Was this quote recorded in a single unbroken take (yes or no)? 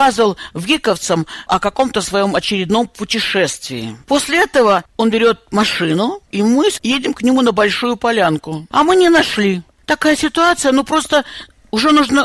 no